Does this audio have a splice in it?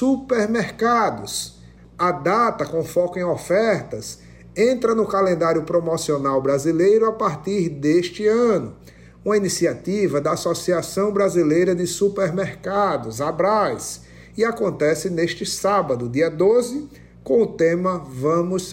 yes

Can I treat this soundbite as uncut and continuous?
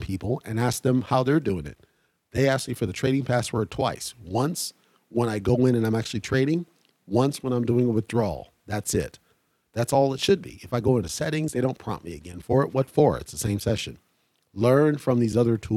yes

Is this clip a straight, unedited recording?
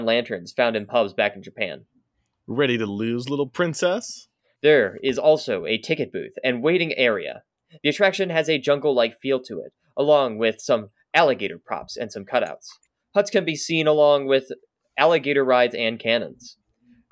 no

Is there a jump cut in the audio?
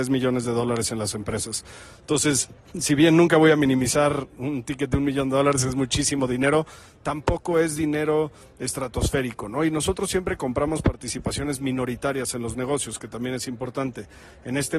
no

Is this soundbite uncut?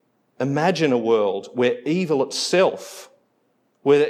yes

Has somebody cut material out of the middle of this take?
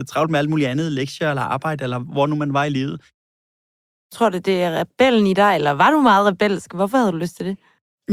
no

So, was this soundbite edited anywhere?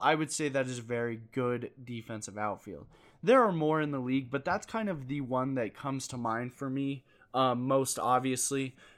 no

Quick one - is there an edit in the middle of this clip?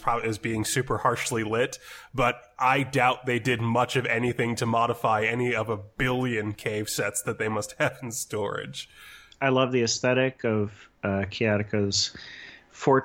no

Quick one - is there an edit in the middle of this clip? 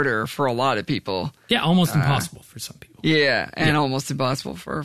no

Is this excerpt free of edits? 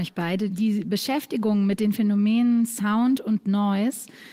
yes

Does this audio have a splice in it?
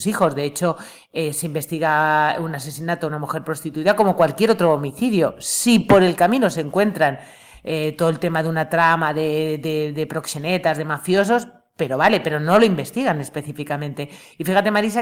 no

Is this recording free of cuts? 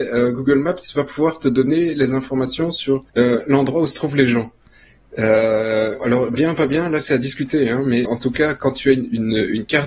no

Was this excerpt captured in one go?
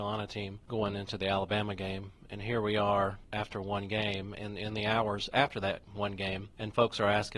yes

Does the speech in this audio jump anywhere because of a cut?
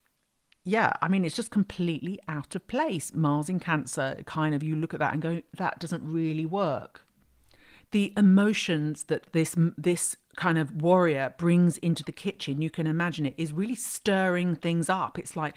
no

